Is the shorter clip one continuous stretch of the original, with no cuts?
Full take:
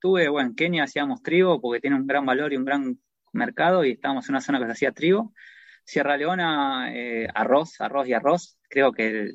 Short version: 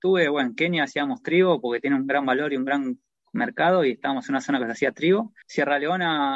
no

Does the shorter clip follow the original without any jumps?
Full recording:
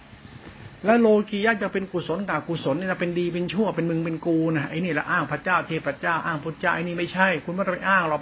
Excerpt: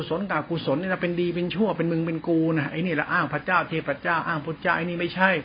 yes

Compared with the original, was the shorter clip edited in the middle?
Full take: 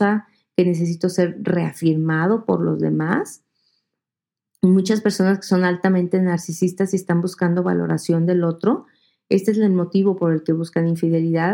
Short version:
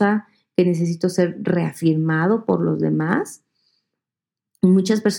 no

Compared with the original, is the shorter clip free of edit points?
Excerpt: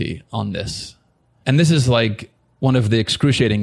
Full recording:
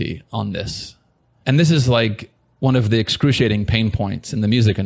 yes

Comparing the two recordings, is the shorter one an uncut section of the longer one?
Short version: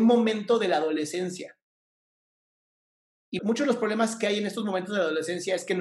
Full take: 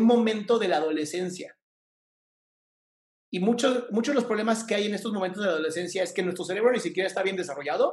no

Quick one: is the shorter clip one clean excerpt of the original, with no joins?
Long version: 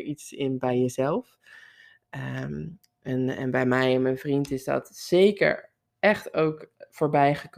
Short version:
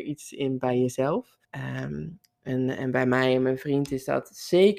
no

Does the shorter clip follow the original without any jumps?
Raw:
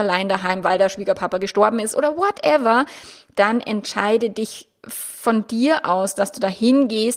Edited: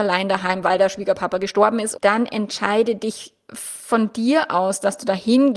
no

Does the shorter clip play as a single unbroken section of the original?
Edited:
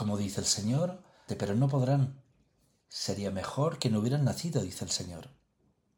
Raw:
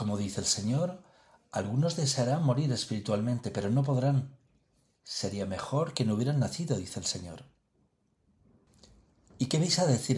no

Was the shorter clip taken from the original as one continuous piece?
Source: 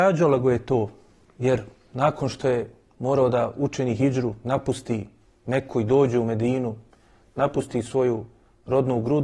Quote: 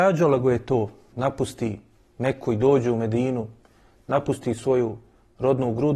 no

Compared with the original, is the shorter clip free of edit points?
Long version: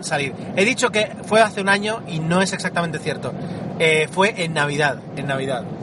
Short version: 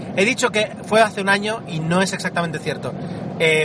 yes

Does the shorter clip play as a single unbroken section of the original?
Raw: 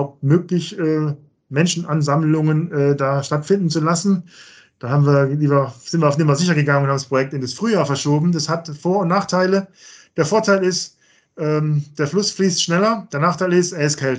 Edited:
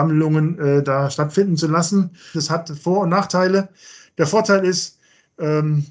no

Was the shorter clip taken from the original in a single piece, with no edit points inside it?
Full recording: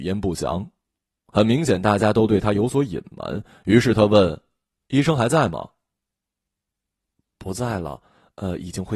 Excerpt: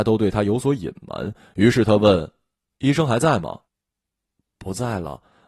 no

